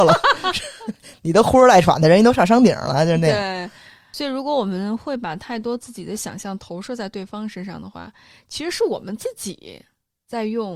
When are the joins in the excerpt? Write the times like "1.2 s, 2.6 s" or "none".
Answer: none

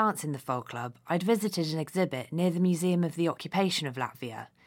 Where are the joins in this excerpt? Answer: none

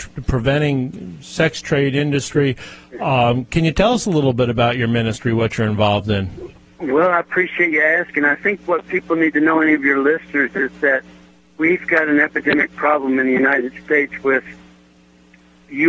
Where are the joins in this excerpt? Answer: none

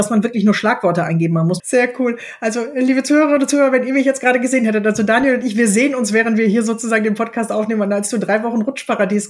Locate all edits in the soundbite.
1.6 s

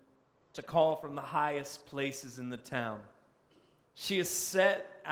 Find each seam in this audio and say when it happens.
3.9 s

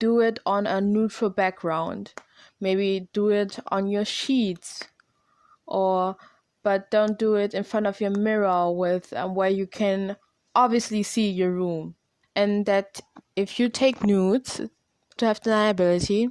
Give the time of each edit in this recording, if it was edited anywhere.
12.2 s, 15.2 s

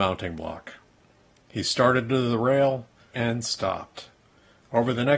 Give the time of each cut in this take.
3.1 s

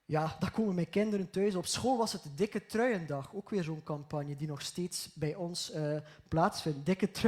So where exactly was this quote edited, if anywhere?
none

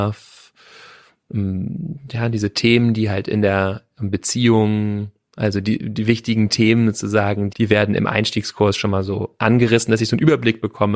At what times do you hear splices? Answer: 7.5 s

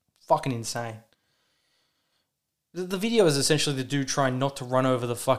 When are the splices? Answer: none

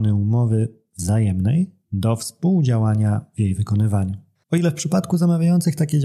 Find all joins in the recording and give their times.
4.4 s

